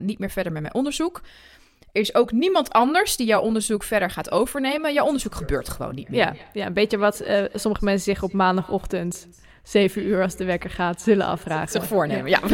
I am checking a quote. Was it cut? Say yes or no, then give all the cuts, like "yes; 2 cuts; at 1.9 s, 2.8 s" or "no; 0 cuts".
no; 0 cuts